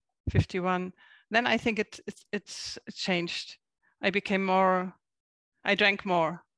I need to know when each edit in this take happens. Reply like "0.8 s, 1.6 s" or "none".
none

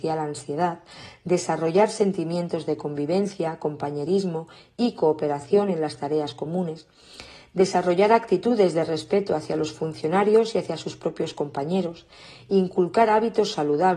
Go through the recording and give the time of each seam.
none

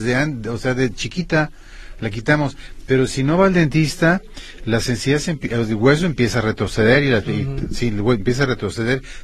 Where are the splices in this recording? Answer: none

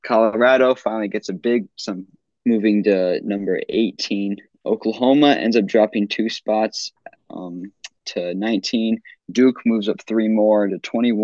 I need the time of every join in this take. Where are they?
2.4 s, 9.2 s

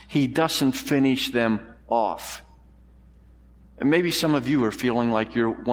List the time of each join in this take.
none

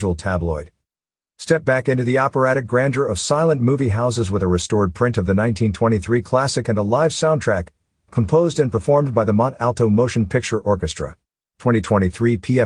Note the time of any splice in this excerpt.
1.3 s, 11.4 s

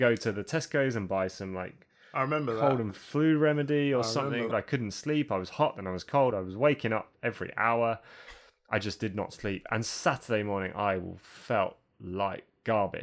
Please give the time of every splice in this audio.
4.5 s, 6.3 s

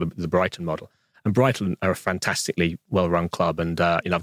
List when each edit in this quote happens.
none

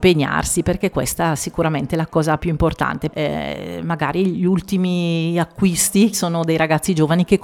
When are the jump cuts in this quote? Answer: 3.1 s, 6.1 s

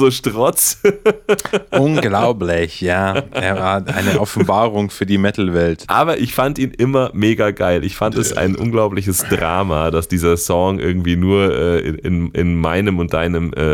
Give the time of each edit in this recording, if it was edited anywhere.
5.8 s

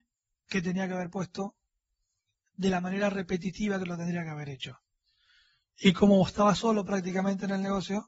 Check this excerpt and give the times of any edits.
none

